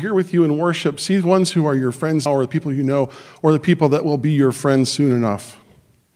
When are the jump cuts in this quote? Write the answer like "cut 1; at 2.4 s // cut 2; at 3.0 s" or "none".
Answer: cut 1; at 2.3 s